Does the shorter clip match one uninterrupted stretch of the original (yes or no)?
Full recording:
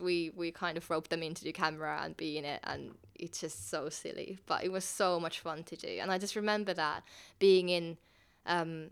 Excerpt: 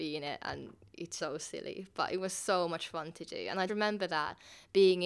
no